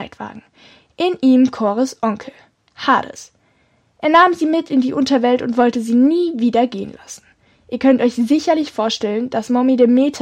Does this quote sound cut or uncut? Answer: uncut